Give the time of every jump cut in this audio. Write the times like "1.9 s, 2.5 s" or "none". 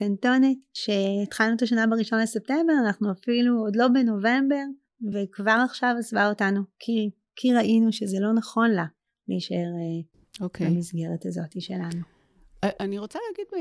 none